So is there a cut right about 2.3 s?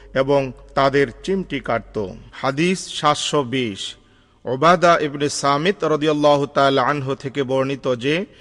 yes; 1 cut; at 2.3 s

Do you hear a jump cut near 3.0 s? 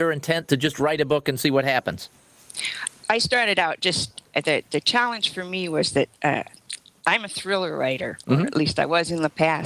no; 0 cuts

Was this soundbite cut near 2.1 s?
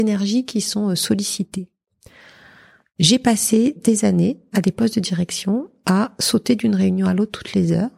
no; 0 cuts

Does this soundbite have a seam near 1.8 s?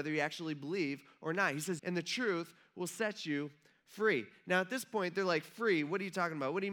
yes; 1 cut; at 1.8 s

